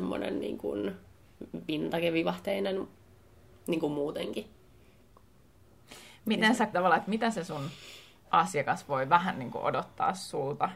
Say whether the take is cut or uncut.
cut